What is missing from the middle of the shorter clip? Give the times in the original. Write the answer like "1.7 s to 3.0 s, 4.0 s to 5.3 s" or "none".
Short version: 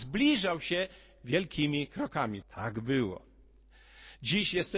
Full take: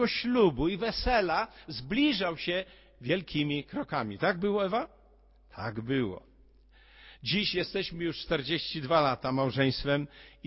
4.2 s to 5.4 s